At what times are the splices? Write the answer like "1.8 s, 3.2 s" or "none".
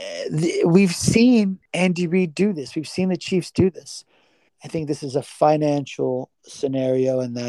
4.5 s